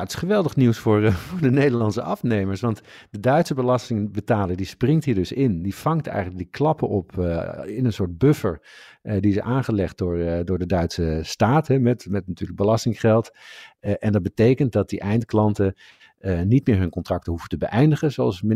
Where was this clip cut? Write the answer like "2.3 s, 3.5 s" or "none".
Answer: none